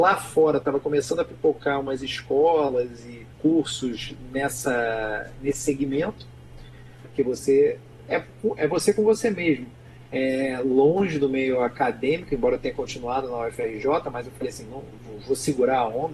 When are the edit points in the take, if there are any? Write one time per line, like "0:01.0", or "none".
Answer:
0:03.3
0:07.0
0:10.1